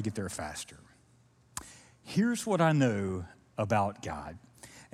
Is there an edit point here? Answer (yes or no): no